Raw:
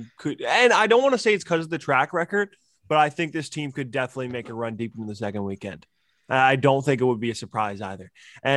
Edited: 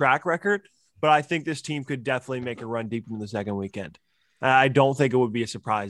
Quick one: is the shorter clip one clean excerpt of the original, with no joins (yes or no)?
yes